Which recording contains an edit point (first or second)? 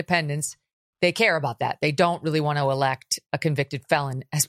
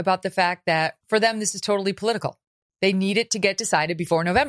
second